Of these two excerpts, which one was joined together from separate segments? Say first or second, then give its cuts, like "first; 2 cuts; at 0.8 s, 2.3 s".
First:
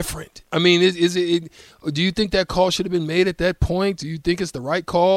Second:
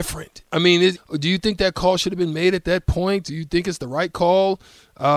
second; 1 cut; at 1.0 s